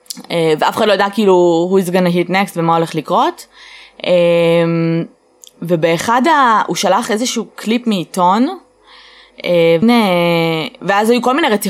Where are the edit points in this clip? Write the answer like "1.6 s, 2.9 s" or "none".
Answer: 9.8 s